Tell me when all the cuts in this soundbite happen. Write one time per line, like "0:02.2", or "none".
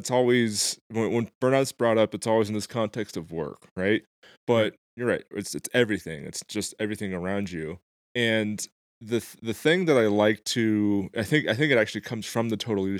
none